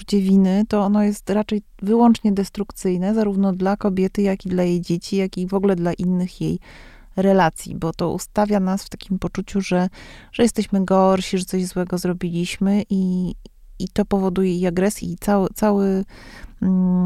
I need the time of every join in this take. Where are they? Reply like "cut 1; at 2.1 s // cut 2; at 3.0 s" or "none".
cut 1; at 15.0 s